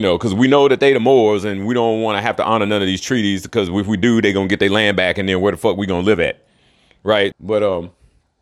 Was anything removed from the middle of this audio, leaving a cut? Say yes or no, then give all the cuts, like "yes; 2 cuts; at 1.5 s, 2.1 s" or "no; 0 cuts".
yes; 1 cut; at 7.3 s